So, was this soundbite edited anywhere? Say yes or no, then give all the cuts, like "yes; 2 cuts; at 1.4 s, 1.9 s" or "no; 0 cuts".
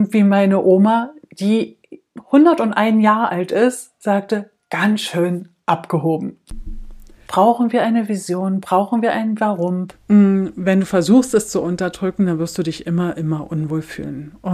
yes; 2 cuts; at 7.3 s, 9.9 s